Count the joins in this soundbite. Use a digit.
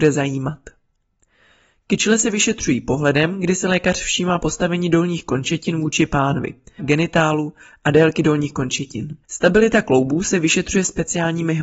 2